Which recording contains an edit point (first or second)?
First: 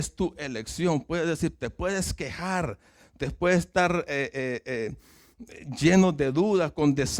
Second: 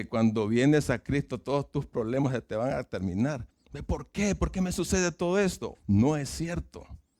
second